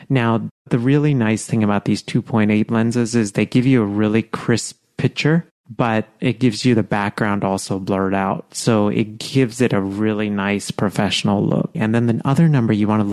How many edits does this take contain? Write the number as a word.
one